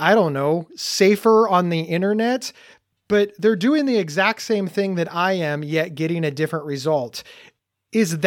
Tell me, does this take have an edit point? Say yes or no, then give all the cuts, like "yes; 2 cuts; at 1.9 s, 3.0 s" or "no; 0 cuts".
no; 0 cuts